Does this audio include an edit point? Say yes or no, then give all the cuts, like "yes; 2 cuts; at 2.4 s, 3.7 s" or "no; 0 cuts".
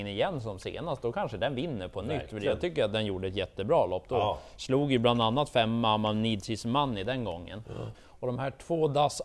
yes; 1 cut; at 7.9 s